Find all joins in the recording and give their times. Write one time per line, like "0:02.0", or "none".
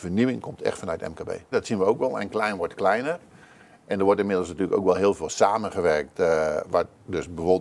0:01.5